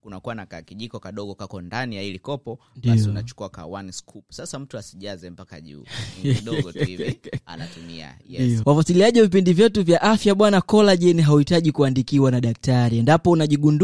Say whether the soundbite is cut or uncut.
cut